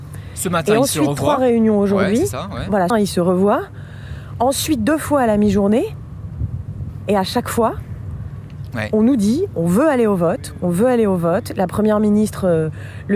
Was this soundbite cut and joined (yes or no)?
yes